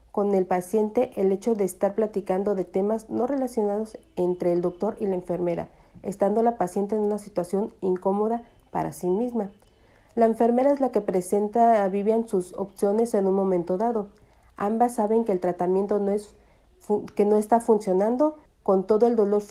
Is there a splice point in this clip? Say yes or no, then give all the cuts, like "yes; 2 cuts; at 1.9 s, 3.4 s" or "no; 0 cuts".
yes; 1 cut; at 18.5 s